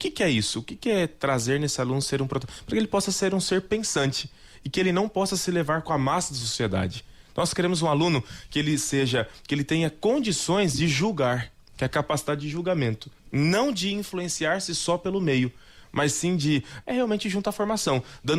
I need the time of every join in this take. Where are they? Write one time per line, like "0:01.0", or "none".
0:13.2
0:16.8